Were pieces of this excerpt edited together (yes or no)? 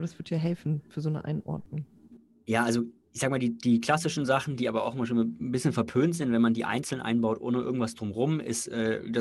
no